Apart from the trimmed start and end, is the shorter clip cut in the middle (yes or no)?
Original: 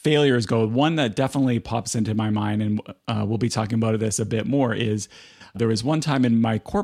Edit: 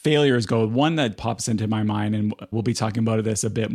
yes